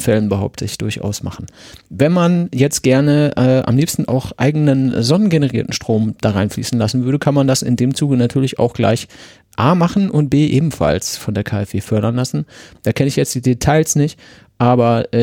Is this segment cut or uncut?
uncut